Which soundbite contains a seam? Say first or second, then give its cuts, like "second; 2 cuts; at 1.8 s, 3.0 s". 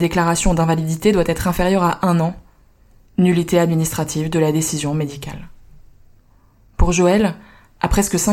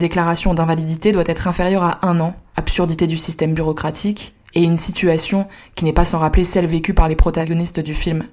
second; 1 cut; at 2.5 s